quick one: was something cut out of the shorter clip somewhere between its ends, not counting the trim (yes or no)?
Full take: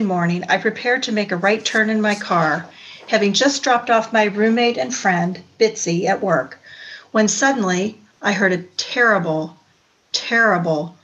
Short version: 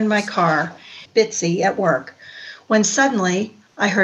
yes